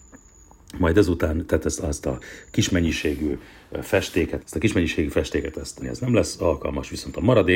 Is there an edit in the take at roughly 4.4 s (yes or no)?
yes